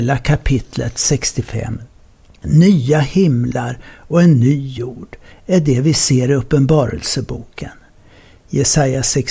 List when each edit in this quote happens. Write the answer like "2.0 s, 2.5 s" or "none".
5.3 s